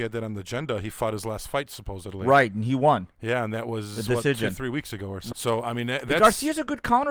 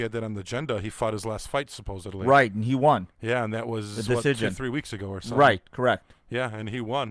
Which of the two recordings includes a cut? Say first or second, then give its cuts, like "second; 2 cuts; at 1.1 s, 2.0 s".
first; 1 cut; at 5.3 s